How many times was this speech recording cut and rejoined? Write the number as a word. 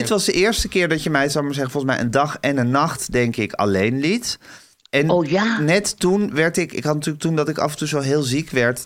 zero